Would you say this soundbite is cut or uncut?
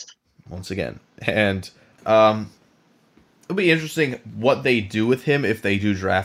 cut